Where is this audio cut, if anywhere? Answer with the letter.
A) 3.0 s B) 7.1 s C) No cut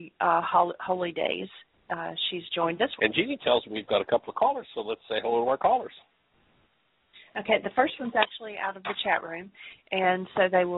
A